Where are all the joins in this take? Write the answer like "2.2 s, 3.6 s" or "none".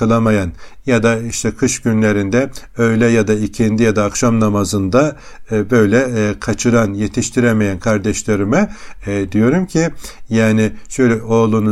none